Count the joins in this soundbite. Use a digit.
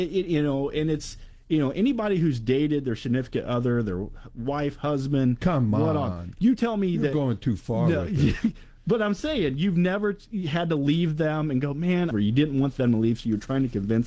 1